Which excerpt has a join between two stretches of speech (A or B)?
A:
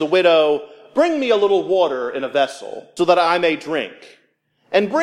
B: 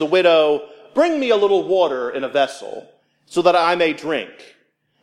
A